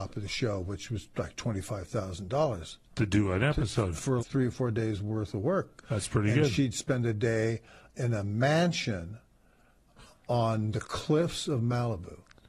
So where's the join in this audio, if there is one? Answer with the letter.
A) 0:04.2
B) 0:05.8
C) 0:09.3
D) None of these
A